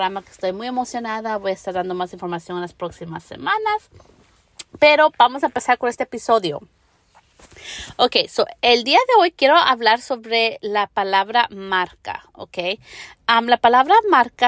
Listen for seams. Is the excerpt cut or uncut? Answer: uncut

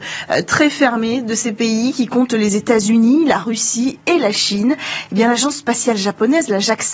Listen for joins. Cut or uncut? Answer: uncut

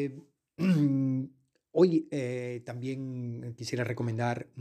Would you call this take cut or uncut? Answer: uncut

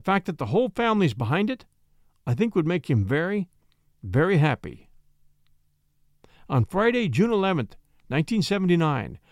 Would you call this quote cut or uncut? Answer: uncut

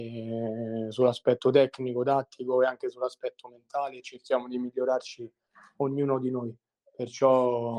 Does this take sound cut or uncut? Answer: uncut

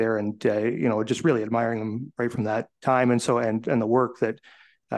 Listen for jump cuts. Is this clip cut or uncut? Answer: cut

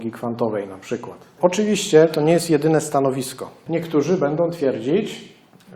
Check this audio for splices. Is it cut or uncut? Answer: uncut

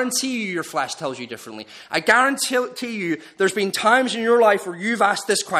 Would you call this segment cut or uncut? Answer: uncut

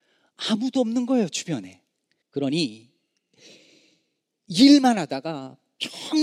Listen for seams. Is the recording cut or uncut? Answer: cut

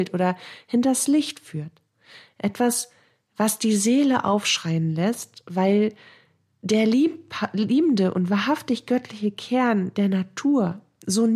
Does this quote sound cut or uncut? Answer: uncut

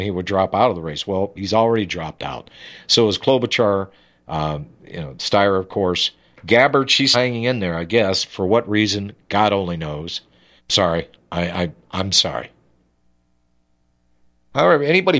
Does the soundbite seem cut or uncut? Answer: cut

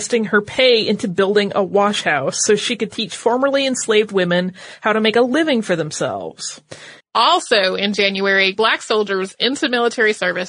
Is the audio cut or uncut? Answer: cut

